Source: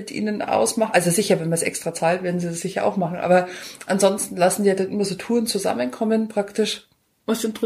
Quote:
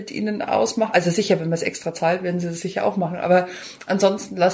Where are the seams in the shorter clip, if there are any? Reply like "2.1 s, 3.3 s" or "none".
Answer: none